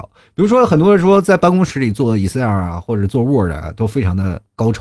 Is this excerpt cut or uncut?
uncut